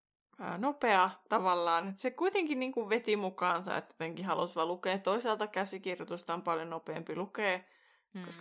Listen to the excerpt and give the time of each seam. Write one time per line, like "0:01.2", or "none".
none